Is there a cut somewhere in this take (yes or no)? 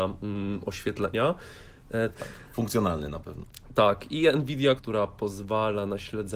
yes